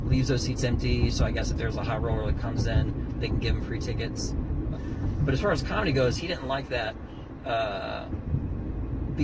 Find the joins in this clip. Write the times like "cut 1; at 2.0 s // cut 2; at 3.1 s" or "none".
cut 1; at 4.7 s